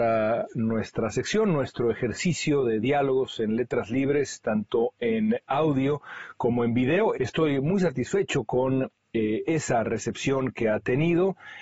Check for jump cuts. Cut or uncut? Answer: cut